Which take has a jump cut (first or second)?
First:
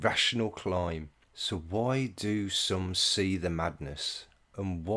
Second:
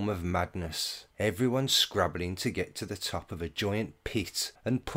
first